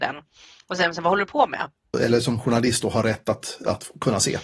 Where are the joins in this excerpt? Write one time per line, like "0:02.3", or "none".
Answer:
0:01.9